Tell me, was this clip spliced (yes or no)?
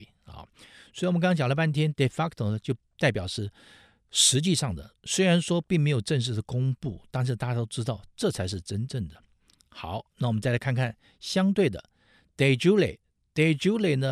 no